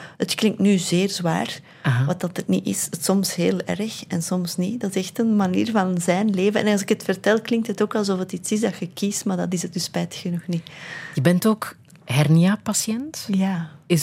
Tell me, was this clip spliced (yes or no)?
no